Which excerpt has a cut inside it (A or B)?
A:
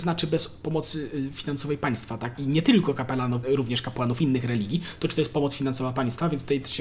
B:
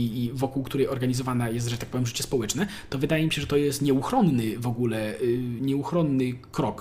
A